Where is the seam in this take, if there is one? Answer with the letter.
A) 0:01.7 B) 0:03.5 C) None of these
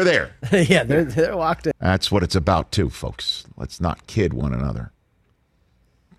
A